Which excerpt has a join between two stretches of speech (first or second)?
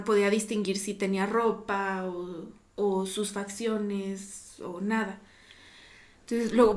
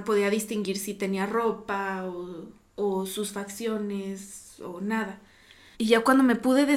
second